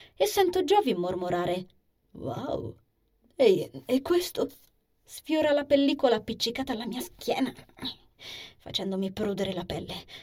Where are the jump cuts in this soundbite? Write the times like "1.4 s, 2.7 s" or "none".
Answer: none